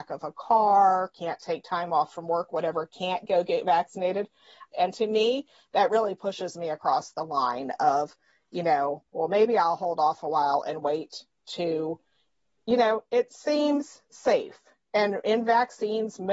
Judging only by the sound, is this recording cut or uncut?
cut